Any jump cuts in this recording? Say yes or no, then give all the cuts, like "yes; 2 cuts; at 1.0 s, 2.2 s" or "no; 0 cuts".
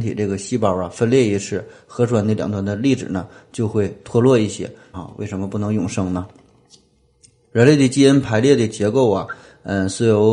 yes; 1 cut; at 4.9 s